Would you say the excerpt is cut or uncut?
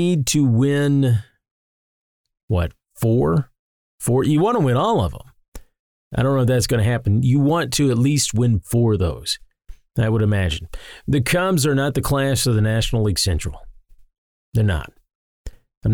uncut